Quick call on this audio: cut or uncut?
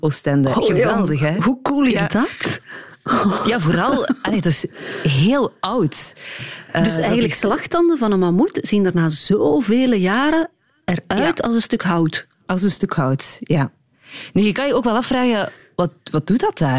uncut